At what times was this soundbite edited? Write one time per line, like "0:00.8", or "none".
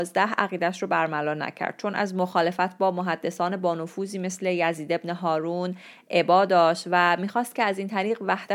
none